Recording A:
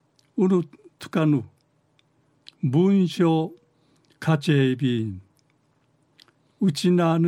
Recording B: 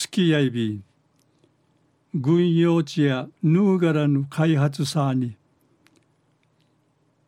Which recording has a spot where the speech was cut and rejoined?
B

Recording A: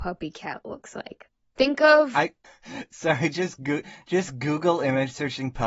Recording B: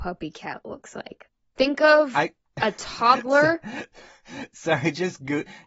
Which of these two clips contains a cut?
A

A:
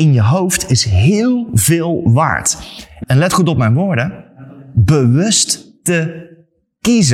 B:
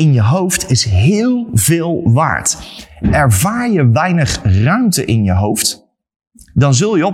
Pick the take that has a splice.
A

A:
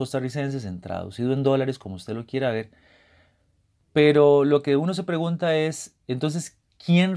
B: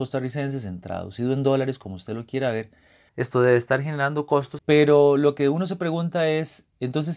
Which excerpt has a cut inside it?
B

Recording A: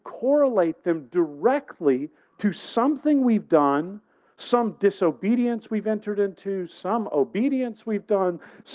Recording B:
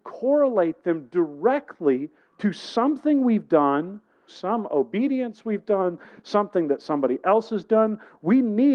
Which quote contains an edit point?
B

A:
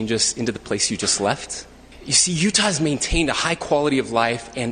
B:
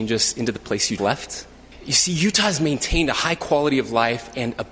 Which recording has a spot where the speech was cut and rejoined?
B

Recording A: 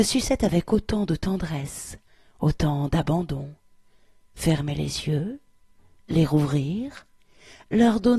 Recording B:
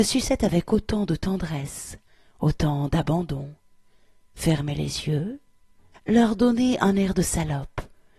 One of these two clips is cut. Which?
B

